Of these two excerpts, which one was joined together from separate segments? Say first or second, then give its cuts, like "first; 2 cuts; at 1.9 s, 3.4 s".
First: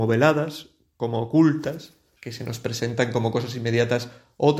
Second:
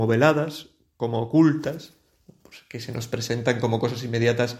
first; 1 cut; at 2.2 s